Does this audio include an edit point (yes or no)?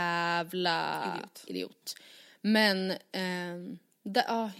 no